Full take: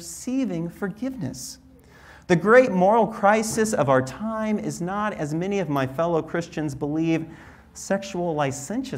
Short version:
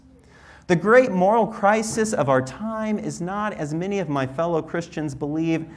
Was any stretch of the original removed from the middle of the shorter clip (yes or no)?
no